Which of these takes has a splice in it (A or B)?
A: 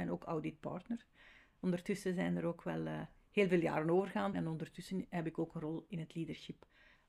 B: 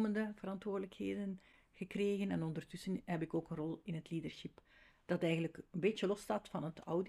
A